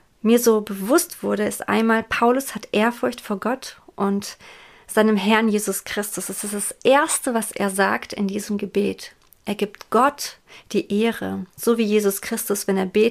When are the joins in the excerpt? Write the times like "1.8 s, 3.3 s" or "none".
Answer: none

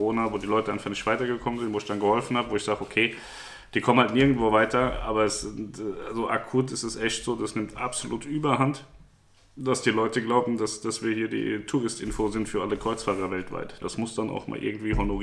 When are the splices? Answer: 13.8 s

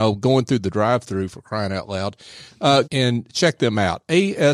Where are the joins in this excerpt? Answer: 2.8 s

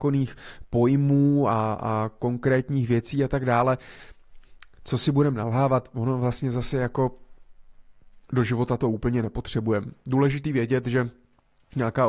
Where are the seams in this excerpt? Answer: 8.2 s

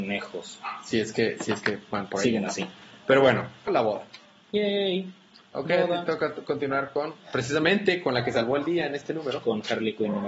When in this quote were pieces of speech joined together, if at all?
3.7 s

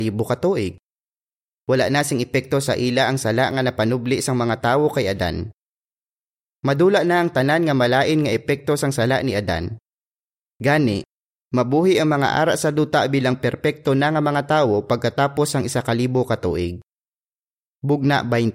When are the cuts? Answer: 1.5 s

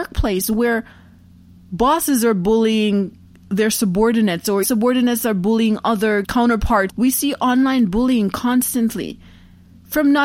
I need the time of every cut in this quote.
4.6 s, 6.9 s

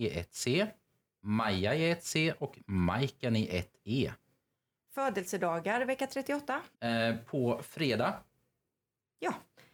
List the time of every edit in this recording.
4.9 s, 6.7 s

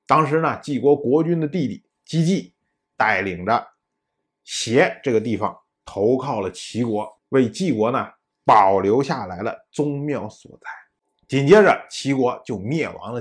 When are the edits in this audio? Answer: 7.2 s

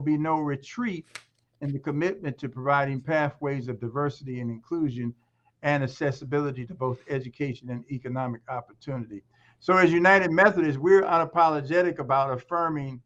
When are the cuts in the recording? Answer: none

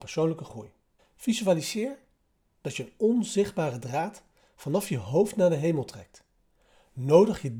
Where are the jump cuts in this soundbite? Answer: 1.0 s

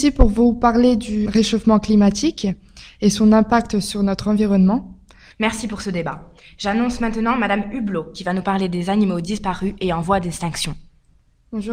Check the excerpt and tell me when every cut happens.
1.2 s, 5.3 s

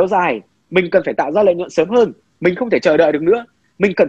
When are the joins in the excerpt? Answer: none

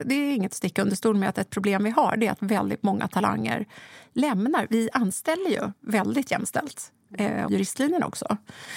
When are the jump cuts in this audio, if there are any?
7.5 s

